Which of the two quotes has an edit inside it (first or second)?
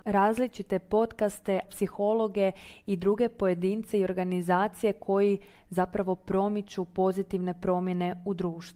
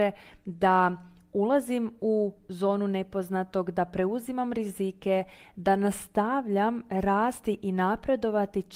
first